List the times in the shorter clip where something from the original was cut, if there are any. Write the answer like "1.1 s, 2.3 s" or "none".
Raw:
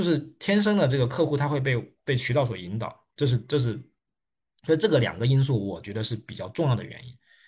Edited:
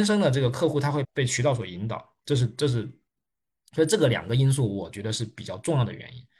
1.0 s